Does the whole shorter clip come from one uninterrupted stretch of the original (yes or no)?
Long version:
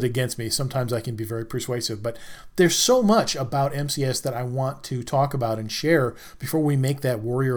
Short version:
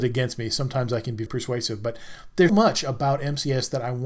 no